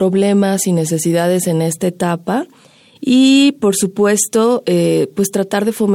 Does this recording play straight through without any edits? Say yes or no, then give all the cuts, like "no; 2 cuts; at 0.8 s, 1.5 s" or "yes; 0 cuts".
yes; 0 cuts